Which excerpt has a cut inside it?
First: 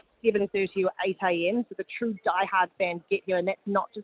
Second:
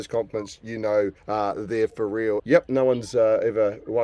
second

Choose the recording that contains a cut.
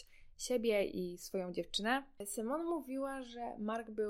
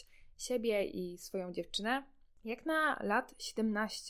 first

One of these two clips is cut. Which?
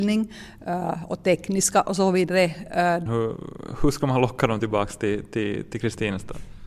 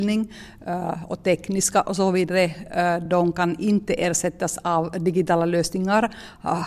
first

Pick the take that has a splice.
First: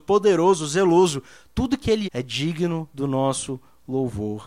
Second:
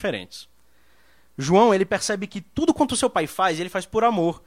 first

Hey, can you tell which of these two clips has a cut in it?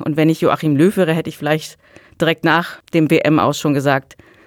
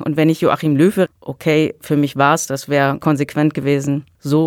second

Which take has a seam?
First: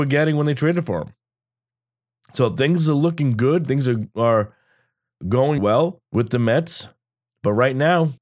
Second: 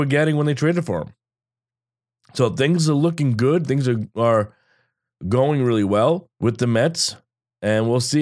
first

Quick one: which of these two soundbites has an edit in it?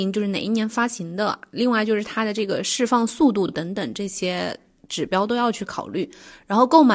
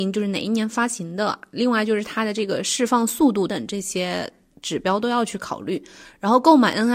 second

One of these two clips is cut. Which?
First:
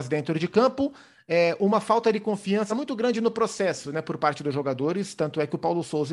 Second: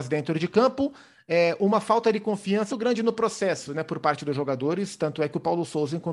second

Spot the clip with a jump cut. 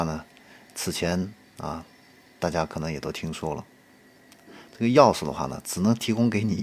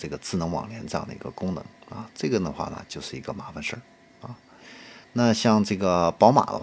second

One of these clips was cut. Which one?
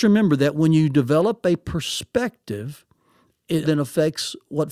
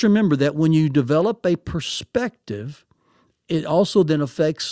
first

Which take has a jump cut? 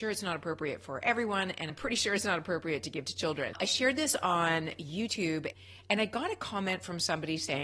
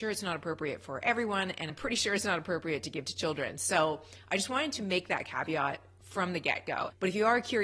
first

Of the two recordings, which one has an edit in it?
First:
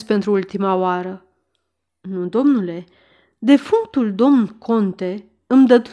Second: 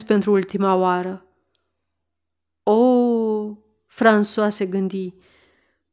first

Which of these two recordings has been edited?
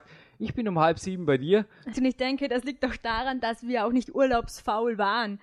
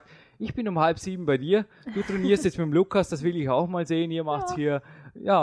first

